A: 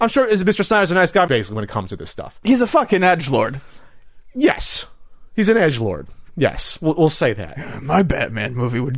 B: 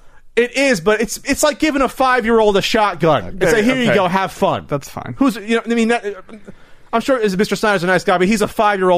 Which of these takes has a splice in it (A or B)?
A